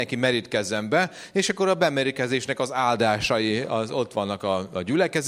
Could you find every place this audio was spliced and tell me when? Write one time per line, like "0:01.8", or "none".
none